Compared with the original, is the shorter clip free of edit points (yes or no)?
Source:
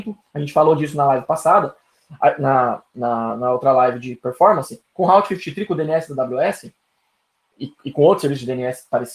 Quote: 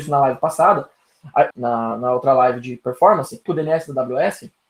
no